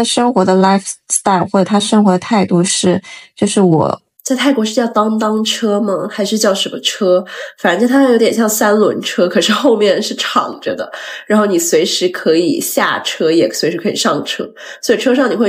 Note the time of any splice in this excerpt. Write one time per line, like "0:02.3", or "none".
0:04.2